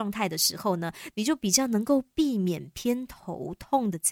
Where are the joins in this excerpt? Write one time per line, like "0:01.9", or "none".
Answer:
none

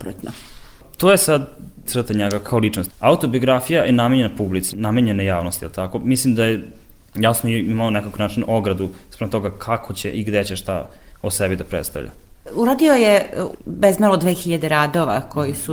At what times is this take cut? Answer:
0:02.9

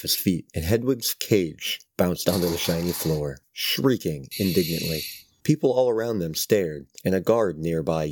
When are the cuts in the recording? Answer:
0:03.4

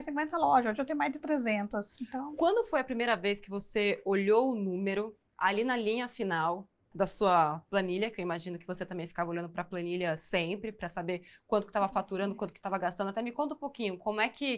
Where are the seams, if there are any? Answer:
0:06.9

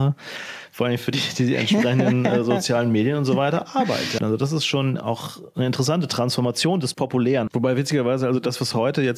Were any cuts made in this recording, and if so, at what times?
0:04.2
0:07.5

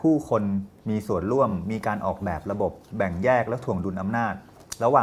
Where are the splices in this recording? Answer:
none

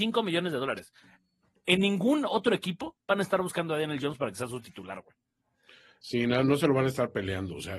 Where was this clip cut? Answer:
none

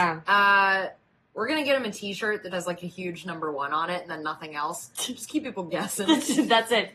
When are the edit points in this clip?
0:02.5

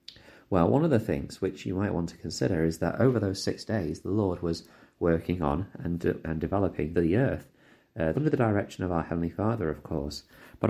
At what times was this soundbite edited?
0:06.9
0:08.1

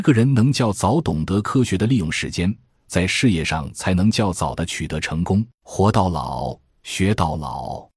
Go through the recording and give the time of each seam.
0:05.5

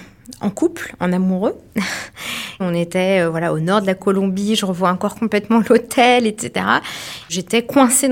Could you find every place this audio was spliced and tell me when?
0:02.6

